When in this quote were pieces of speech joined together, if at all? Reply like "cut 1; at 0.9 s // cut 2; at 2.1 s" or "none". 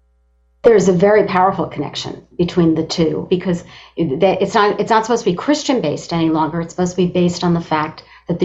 cut 1; at 3.3 s